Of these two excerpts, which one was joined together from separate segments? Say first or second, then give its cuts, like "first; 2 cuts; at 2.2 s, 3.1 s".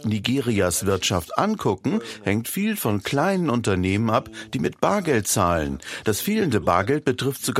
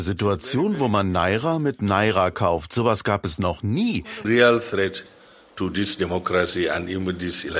second; 1 cut; at 4.2 s